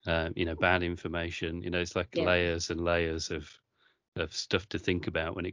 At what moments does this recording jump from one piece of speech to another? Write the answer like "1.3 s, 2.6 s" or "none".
none